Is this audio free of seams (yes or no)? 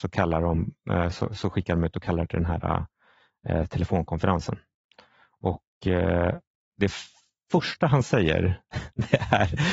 yes